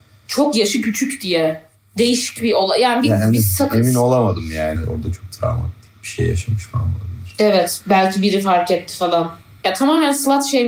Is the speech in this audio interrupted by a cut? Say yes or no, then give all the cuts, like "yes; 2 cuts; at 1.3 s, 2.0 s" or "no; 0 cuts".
yes; 2 cuts; at 4.7 s, 9.6 s